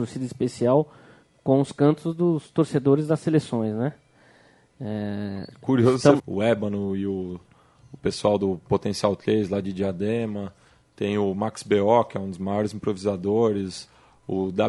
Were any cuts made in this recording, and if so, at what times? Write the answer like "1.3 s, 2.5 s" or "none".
6.2 s